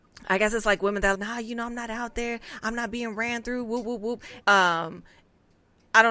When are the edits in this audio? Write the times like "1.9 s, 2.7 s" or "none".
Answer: 1.1 s, 4.4 s